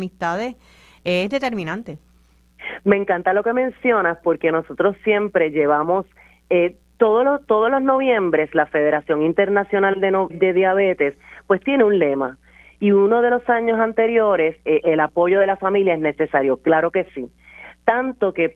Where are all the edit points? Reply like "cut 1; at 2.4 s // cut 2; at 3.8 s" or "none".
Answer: cut 1; at 10.3 s // cut 2; at 14.8 s